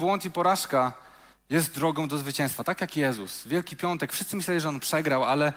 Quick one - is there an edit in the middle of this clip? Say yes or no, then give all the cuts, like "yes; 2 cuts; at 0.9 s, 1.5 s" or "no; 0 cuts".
no; 0 cuts